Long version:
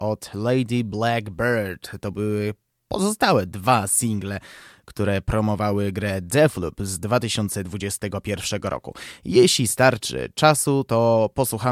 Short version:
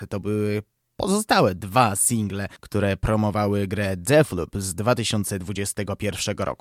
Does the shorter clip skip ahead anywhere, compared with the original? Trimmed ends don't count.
yes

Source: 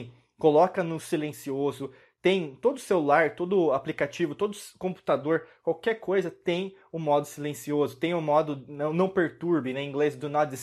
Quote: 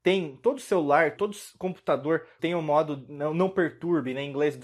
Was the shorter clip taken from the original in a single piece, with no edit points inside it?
no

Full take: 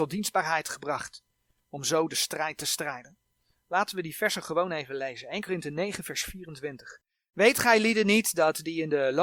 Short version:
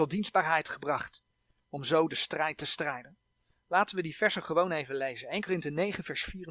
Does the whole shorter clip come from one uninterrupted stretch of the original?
yes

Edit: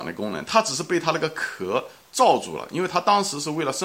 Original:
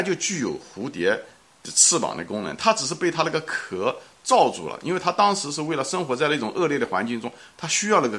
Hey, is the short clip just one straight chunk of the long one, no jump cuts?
yes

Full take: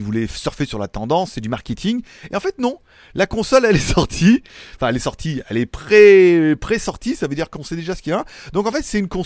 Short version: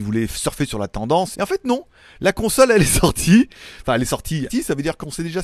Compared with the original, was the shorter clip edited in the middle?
yes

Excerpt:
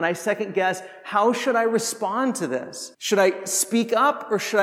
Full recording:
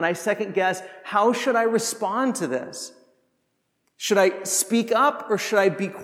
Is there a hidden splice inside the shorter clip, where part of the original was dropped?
yes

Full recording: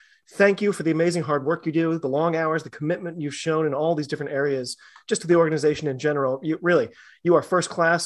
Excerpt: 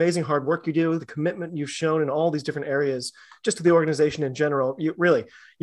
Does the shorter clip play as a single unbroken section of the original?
no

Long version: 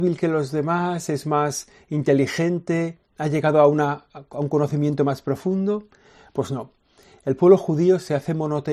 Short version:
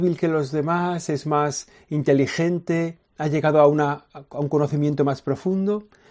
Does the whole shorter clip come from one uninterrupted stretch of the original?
yes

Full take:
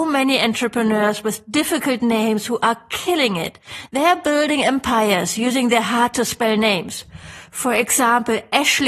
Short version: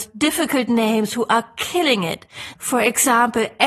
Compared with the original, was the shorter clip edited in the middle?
yes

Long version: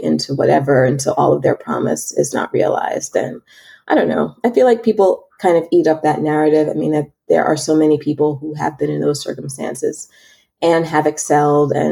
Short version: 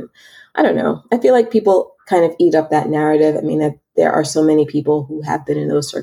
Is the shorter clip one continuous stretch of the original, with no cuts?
yes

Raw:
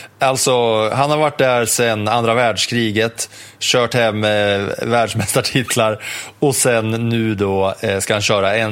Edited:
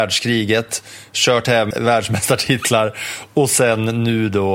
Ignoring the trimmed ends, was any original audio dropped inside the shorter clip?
yes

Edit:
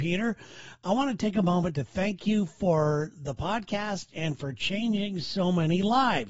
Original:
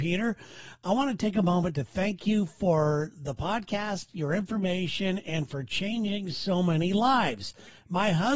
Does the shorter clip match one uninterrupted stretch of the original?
no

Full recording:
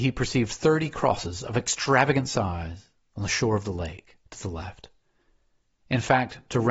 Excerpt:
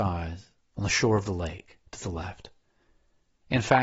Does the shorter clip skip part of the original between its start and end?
no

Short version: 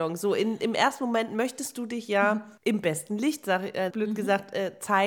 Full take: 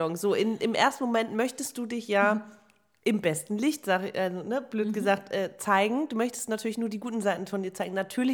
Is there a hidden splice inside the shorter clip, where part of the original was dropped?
yes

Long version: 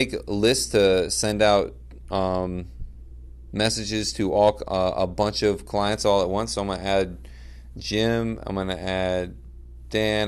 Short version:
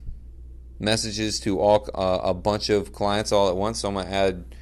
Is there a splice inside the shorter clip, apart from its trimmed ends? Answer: no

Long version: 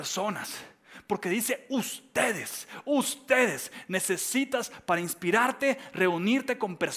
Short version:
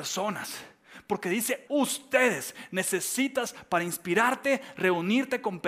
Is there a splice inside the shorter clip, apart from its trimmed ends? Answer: yes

